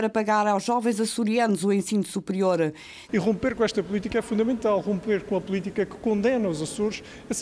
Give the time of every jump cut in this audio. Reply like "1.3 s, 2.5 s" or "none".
3.1 s

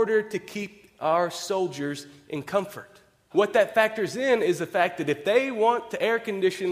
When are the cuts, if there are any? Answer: 3.3 s

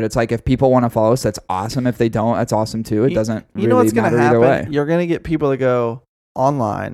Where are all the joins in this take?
none

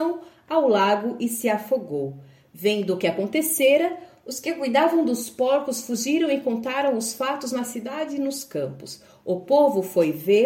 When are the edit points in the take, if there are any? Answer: none

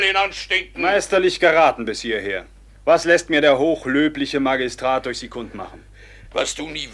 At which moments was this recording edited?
2.7 s

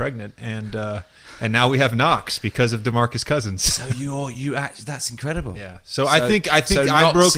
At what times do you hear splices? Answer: none

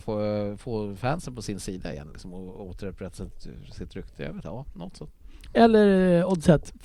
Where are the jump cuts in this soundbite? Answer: none

